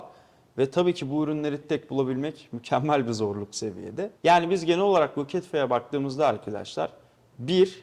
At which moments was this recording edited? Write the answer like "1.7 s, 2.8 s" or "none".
1.6 s, 4.2 s

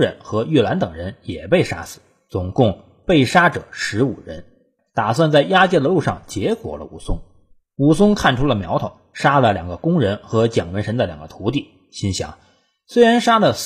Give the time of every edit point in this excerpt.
4.8 s

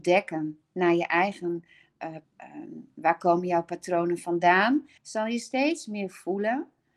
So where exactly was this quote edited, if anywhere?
2.2 s, 5.0 s

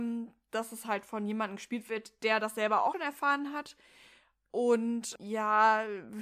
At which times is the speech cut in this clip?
2.9 s, 5.2 s

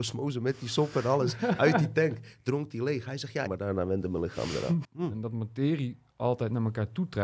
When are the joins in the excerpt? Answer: 3.5 s, 4.8 s

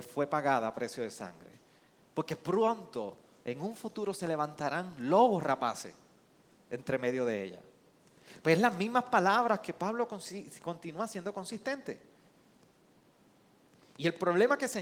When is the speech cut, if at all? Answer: none

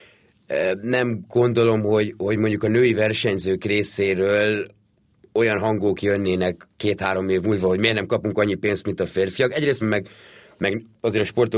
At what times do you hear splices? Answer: 9.8 s

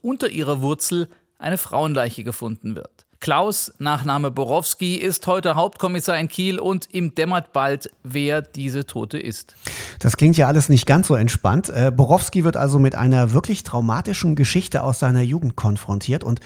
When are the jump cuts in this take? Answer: 3.1 s

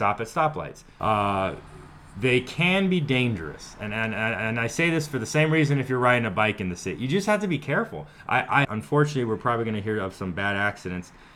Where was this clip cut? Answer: 1.0 s, 8.6 s

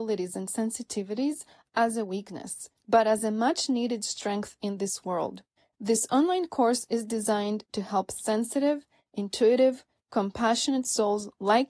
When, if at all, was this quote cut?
none

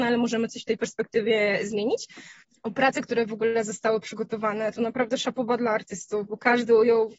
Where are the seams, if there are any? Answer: none

